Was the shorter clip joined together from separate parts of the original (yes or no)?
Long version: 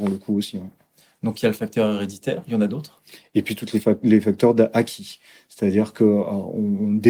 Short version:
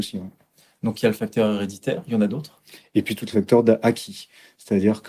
yes